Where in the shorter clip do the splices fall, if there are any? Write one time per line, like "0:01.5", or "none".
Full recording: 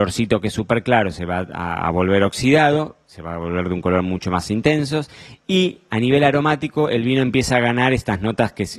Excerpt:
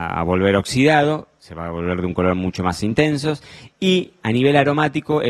none